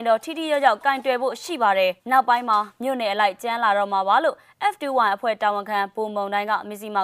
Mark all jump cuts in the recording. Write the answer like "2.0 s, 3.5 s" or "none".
2.0 s